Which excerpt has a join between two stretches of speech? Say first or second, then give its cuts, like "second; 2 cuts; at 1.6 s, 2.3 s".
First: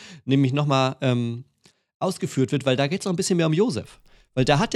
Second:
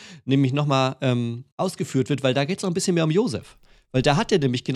second; 1 cut; at 1.5 s